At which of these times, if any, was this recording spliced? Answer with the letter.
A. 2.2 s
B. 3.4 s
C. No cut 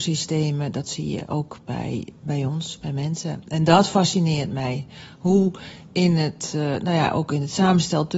A